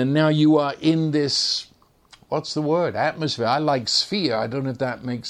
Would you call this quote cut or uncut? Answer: uncut